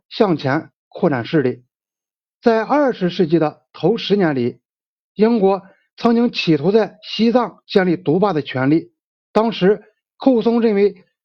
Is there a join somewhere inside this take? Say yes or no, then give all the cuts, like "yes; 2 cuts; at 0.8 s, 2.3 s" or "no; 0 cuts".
no; 0 cuts